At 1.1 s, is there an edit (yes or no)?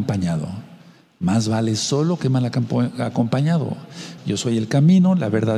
no